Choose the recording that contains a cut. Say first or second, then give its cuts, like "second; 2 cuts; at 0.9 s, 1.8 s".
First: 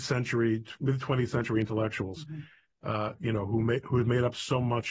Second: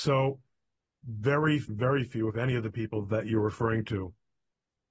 second; 1 cut; at 1.7 s